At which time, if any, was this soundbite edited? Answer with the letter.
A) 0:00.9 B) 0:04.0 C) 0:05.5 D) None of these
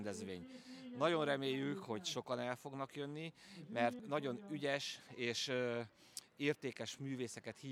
B